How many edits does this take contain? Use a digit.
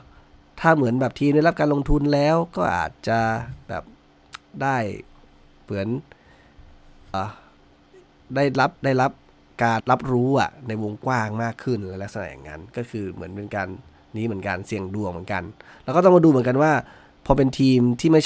3